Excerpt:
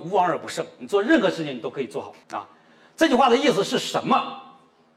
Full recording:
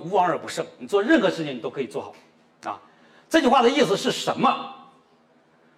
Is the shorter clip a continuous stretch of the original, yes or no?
no